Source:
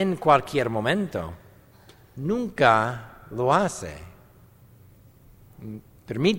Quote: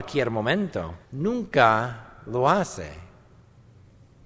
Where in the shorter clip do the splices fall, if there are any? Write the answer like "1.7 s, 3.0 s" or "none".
1.0 s